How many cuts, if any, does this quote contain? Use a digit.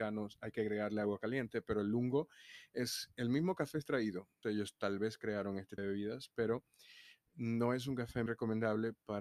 3